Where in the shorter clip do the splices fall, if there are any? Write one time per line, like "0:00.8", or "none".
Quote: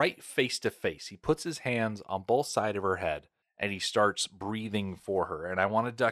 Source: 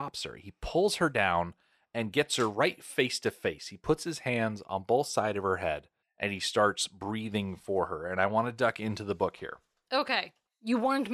none